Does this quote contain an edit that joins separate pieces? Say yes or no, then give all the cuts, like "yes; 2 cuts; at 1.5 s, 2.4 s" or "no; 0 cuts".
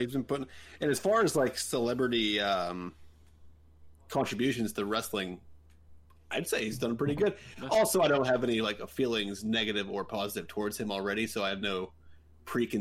no; 0 cuts